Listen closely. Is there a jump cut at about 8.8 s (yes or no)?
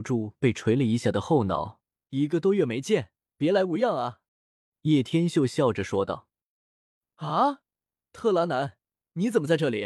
no